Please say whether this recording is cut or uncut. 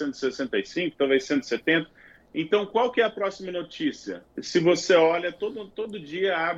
cut